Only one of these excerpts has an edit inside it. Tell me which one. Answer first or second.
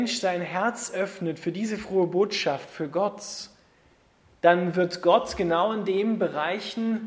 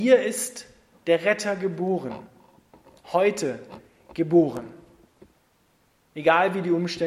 second